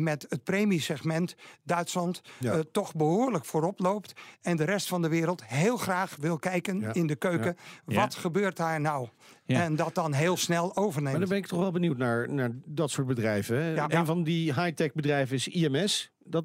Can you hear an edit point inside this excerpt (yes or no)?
yes